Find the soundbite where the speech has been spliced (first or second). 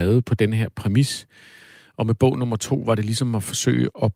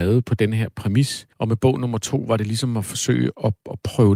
second